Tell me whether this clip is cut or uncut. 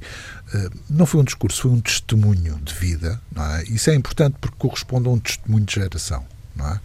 uncut